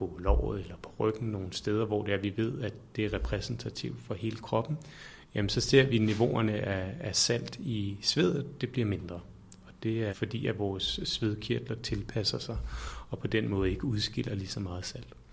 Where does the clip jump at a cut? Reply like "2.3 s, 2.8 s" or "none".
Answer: 10.1 s